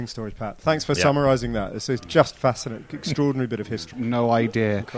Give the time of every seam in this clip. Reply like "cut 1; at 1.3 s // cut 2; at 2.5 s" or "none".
cut 1; at 3.9 s